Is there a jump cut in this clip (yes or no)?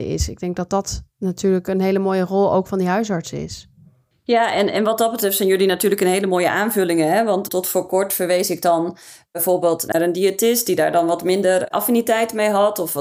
no